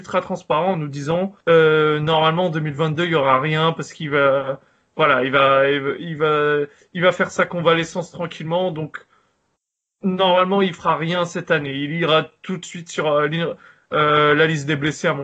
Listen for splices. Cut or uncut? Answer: cut